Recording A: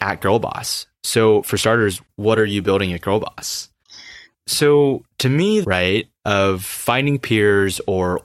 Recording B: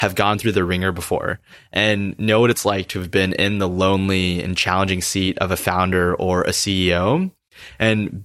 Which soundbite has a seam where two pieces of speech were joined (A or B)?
A